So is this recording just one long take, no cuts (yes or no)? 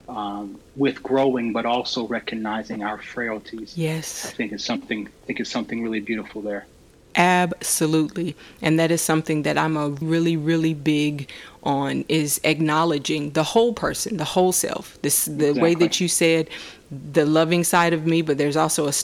no